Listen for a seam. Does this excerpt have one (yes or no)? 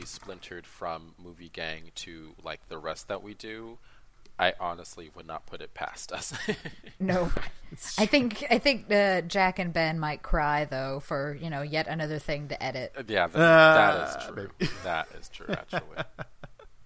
no